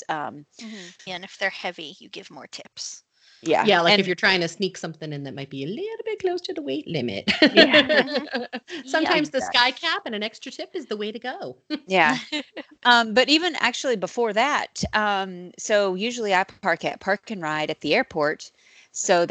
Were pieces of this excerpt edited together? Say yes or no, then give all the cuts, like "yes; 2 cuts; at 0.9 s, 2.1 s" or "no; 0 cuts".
yes; 1 cut; at 1.1 s